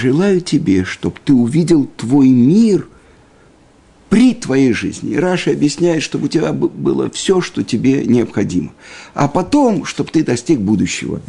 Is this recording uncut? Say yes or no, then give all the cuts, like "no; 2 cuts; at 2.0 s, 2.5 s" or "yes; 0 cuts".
yes; 0 cuts